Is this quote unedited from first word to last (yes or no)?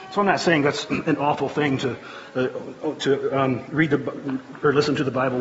yes